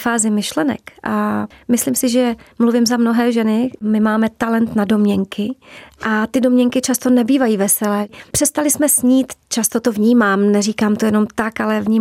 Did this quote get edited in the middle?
no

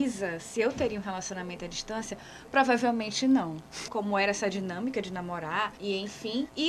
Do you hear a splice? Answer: yes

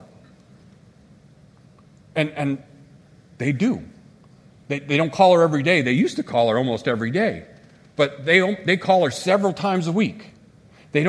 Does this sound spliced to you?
no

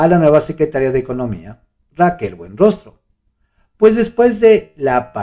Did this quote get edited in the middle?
no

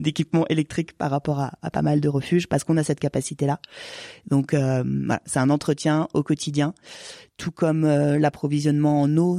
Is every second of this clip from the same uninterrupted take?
yes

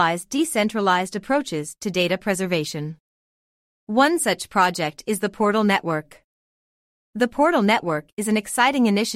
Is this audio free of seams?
yes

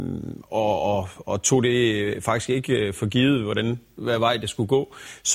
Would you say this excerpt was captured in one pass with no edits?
yes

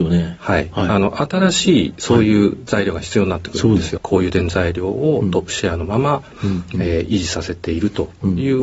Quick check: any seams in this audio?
yes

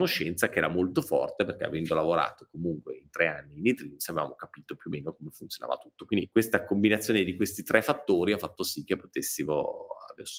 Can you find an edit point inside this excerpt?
no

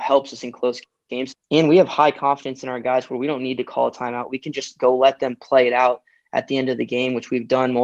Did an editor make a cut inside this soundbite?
yes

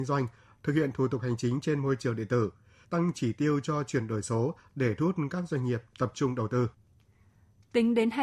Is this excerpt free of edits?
no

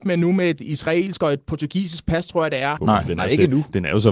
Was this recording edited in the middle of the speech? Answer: yes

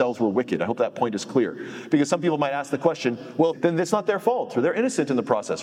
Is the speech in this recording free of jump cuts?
no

